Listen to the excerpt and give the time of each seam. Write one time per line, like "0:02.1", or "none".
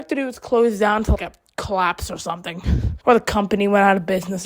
0:01.1
0:03.0